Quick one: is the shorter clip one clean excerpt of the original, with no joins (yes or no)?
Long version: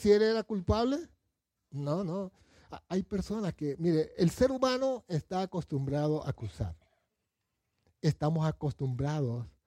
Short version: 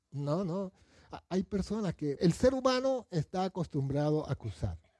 no